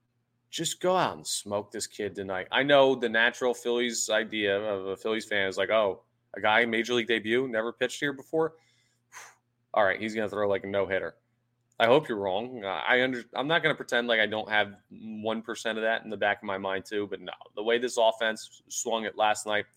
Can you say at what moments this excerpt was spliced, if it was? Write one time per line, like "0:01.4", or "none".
none